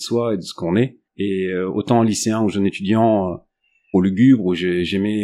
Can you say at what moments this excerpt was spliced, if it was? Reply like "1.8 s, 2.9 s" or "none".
1.1 s, 3.9 s